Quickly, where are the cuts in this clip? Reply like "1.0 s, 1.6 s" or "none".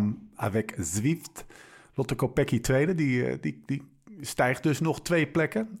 none